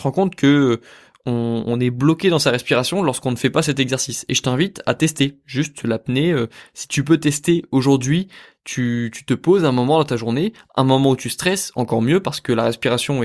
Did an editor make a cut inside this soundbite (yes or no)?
no